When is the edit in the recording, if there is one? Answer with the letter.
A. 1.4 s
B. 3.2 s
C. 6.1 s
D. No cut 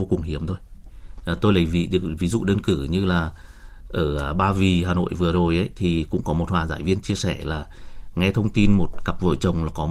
D